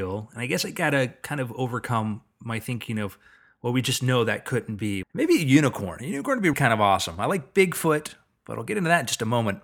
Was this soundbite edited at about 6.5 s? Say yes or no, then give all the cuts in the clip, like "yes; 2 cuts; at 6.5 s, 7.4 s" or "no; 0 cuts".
yes; 2 cuts; at 5.0 s, 6.5 s